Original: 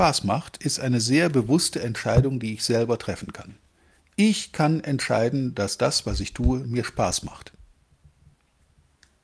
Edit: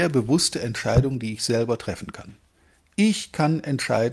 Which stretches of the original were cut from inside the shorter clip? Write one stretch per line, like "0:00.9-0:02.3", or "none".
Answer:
none